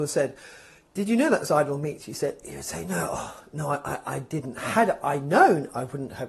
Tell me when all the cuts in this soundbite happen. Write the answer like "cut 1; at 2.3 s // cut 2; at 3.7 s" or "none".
none